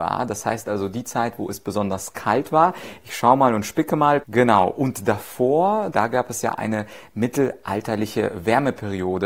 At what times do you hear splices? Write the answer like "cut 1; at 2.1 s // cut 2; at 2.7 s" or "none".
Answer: cut 1; at 4.2 s // cut 2; at 5.9 s